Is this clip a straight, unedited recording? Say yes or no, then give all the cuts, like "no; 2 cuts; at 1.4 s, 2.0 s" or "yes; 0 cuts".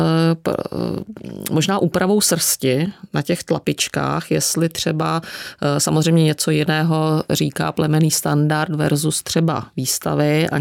yes; 0 cuts